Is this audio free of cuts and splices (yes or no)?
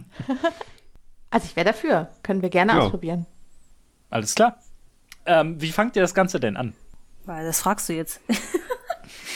yes